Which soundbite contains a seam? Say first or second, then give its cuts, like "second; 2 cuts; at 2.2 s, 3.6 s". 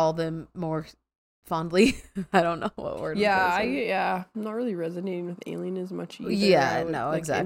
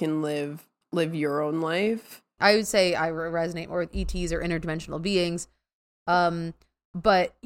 second; 1 cut; at 2.4 s